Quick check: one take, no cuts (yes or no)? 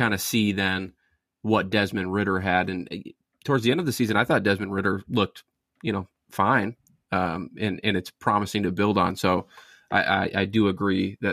yes